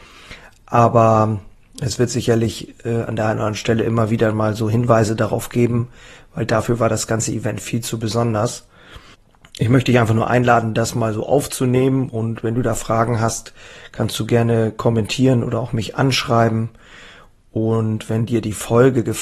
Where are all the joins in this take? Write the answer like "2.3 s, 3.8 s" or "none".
none